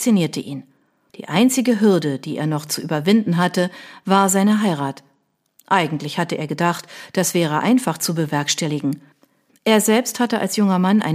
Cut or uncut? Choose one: cut